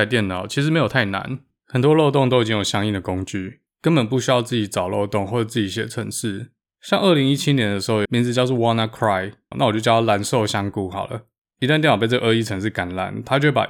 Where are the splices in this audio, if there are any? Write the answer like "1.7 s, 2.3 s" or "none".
8.1 s, 9.5 s

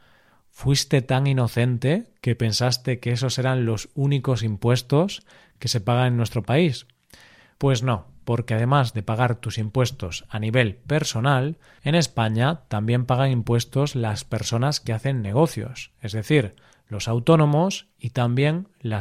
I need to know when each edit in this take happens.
none

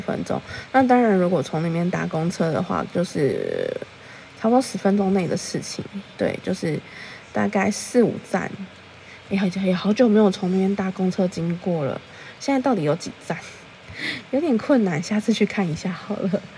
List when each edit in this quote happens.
none

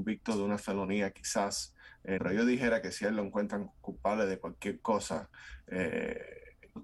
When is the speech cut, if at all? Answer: 2.2 s

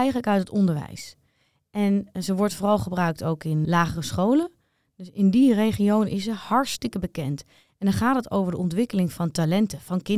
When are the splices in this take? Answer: 3.7 s

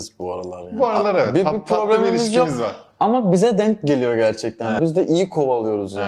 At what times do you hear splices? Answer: 4.8 s

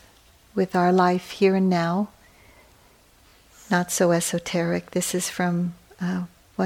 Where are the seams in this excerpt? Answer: none

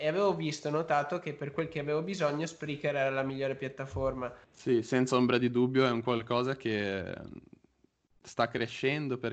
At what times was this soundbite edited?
4.4 s

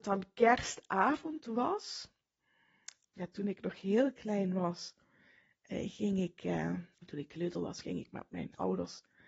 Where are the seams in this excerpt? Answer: 3.0 s, 6.9 s

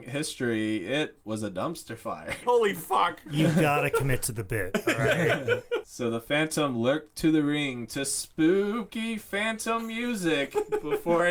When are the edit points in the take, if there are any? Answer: 2.4 s, 5.8 s

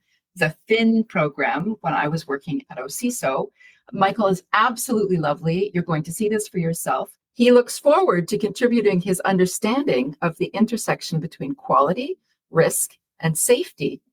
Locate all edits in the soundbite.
7.2 s

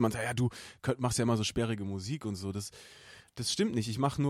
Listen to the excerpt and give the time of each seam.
3.3 s

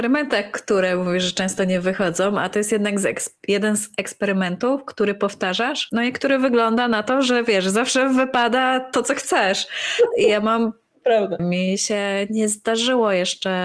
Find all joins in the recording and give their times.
11.4 s

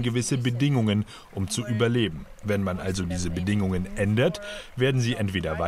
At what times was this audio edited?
none

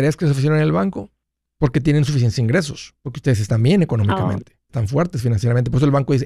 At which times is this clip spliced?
1.6 s, 3.0 s, 4.7 s

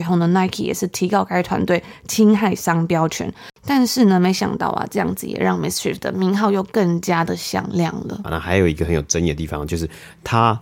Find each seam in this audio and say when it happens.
8.2 s

